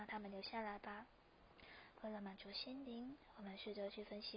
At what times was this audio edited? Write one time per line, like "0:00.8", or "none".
none